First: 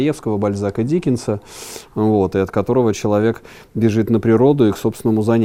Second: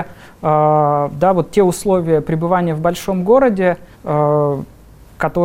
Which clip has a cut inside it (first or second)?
second